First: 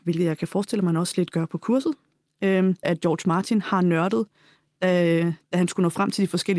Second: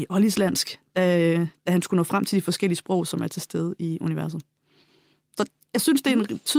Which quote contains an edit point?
first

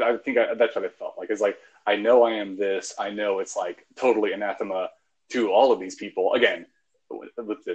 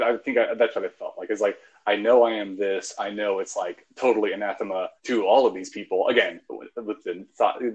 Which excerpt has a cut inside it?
second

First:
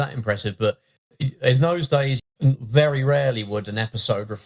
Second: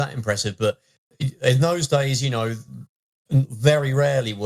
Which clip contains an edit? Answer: first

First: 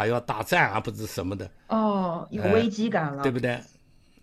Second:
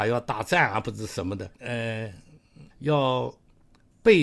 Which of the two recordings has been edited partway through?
second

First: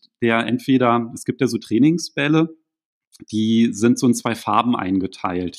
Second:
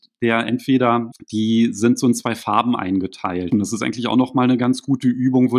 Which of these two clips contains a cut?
second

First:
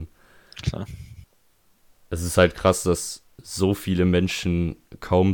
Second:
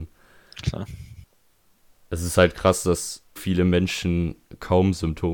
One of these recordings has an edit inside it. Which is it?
second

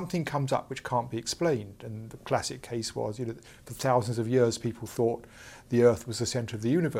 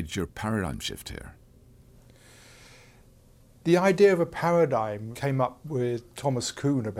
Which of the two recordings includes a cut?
second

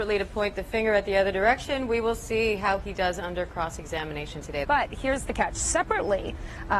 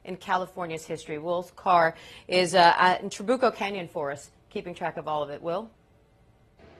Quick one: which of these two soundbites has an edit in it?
first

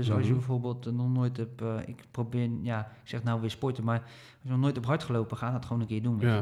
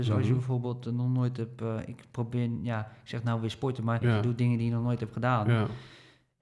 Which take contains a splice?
second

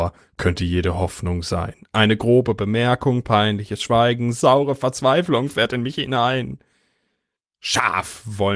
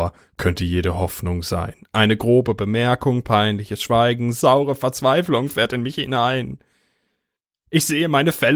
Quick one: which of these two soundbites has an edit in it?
first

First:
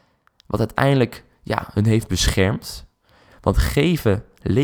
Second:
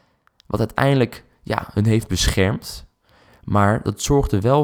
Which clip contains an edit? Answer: first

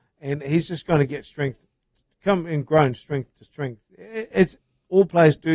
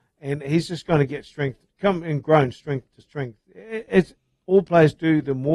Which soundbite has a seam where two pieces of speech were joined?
second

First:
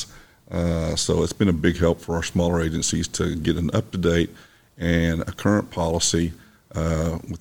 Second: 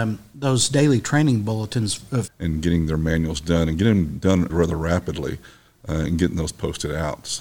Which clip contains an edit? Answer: second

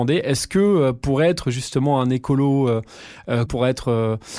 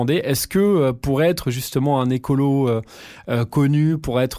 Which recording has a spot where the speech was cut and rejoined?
first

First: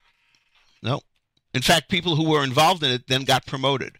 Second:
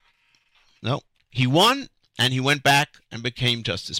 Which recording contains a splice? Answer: second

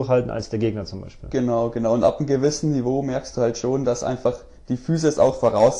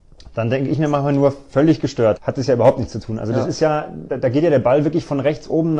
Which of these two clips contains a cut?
second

